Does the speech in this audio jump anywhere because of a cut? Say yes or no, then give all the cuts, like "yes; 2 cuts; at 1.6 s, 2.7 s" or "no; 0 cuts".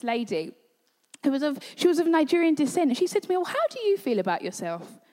no; 0 cuts